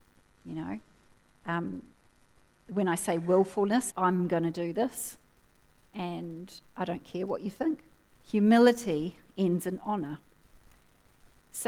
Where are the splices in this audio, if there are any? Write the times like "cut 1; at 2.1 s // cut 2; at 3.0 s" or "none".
cut 1; at 3.9 s // cut 2; at 8.1 s